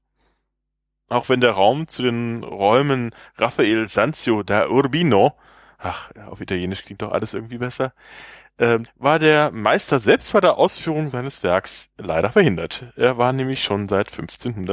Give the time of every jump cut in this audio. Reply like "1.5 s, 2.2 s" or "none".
8.9 s